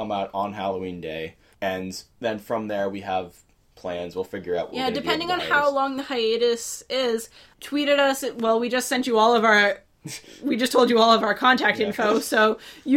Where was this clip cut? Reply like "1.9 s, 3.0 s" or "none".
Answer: none

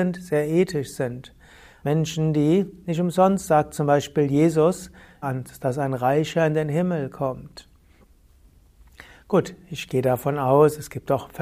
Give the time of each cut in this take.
1.8 s, 5.2 s

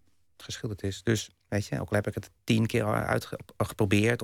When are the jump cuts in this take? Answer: 1.5 s

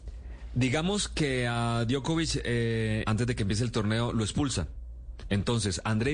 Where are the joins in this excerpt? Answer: 3.0 s

